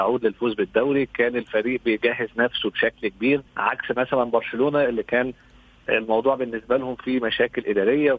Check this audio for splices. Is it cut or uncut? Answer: cut